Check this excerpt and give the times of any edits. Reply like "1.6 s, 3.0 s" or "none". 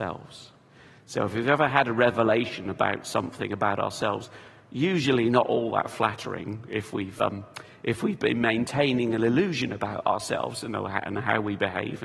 none